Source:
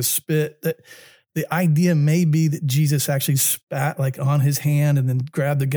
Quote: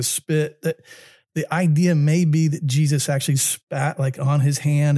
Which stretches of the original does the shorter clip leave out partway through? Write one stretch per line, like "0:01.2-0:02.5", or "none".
none